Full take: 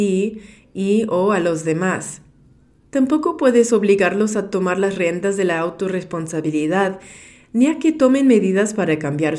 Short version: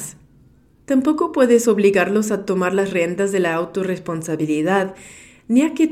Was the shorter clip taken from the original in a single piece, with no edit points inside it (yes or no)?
yes